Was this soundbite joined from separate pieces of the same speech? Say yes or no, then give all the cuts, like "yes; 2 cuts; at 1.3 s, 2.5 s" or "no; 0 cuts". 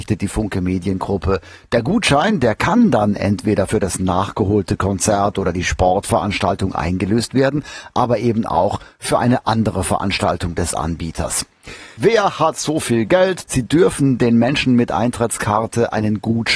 yes; 2 cuts; at 12.0 s, 13.5 s